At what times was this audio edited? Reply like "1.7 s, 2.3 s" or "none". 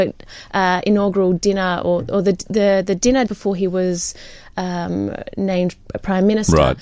3.3 s